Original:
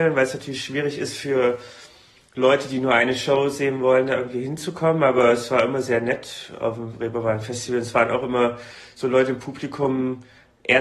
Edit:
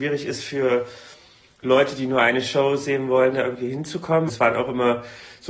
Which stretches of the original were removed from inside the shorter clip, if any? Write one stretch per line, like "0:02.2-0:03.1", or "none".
0:05.0-0:07.8